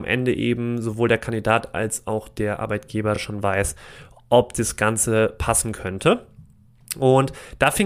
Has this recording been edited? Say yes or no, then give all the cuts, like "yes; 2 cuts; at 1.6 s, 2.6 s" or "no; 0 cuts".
no; 0 cuts